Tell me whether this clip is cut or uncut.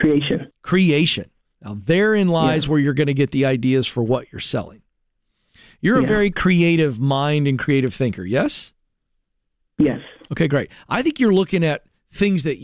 uncut